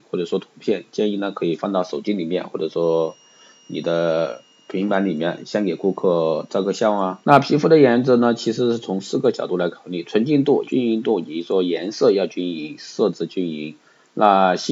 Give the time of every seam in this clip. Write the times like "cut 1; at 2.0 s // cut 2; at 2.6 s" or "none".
cut 1; at 7.2 s // cut 2; at 10.6 s

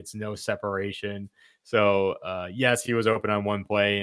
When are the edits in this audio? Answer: none

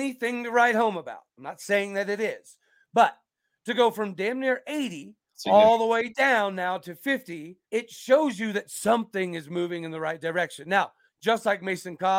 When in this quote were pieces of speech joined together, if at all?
cut 1; at 7.6 s // cut 2; at 11.1 s

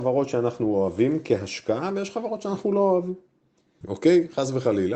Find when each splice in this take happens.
cut 1; at 3.8 s

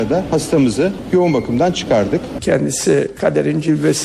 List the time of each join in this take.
cut 1; at 2.4 s

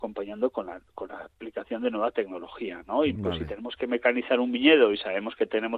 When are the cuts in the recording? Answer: cut 1; at 3.2 s

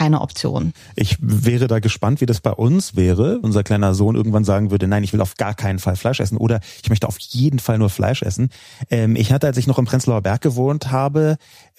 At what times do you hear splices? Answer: cut 1; at 3.4 s

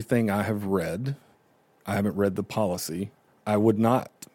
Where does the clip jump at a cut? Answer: cut 1; at 3.3 s

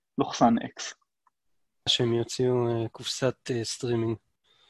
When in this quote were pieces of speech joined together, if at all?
cut 1; at 1.9 s

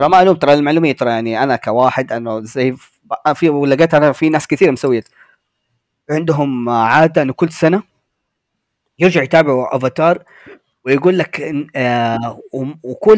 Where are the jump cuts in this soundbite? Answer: none

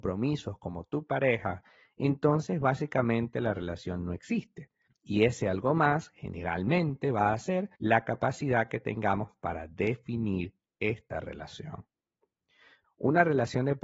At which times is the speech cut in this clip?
cut 1; at 4.9 s // cut 2; at 7.7 s // cut 3; at 12.8 s

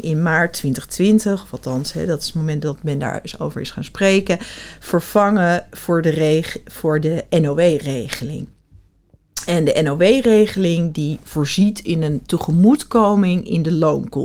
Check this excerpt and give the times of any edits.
none

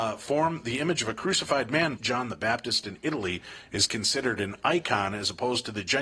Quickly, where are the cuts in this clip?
cut 1; at 2.0 s

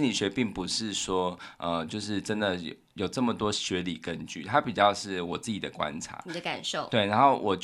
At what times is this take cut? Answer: none

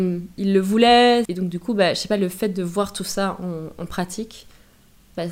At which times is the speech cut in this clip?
cut 1; at 1.3 s

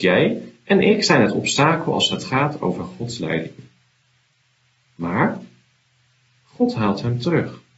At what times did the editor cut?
cut 1; at 4.9 s

